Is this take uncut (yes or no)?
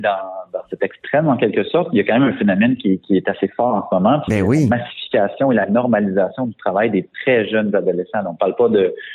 yes